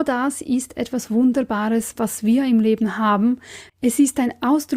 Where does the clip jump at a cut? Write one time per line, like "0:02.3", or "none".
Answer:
0:03.7